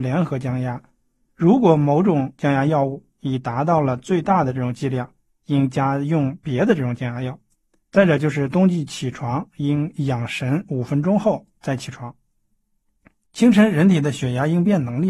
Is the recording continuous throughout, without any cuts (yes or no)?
no